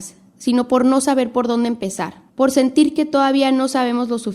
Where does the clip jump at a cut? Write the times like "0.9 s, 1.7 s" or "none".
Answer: 2.3 s

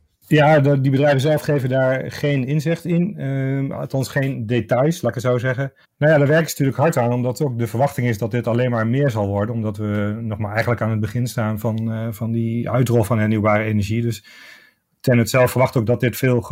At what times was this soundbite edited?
5.8 s

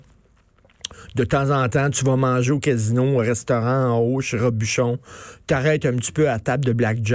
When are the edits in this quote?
none

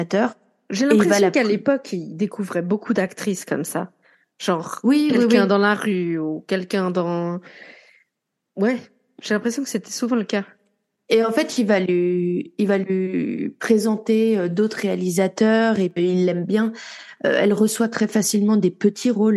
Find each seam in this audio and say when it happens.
none

